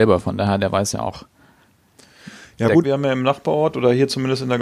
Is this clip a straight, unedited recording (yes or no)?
no